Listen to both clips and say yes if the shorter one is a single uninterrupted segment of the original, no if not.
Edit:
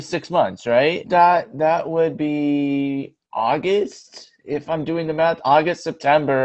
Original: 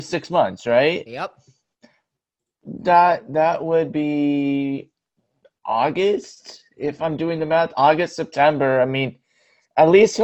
no